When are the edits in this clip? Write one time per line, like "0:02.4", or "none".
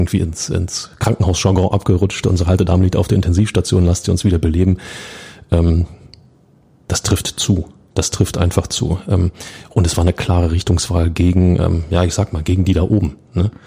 none